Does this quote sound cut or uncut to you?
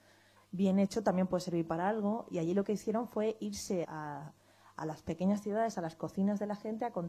cut